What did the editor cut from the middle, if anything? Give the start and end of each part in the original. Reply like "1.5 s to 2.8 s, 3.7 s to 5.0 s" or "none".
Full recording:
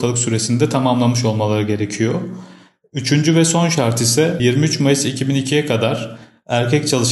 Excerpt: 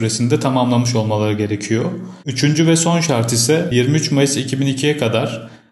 2.5 s to 2.9 s